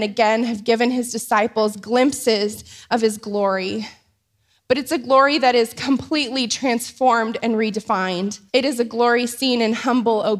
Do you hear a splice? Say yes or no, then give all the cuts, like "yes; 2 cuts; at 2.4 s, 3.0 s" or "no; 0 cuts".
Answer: yes; 1 cut; at 8.5 s